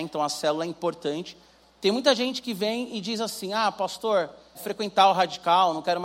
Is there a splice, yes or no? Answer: yes